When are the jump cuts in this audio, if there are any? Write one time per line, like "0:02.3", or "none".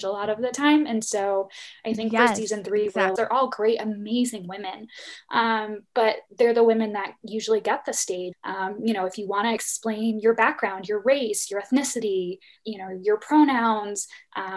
0:03.2
0:08.3
0:12.6